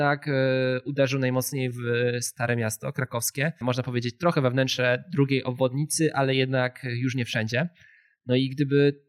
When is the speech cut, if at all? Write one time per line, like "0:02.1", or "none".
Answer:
0:03.6